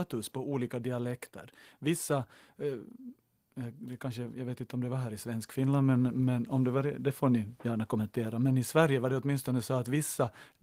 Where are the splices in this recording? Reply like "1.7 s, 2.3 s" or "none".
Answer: none